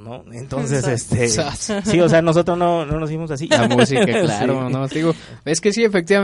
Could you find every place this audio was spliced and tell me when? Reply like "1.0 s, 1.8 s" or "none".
3.5 s, 4.9 s